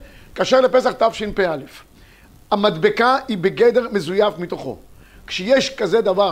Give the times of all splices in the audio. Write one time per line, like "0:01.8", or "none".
none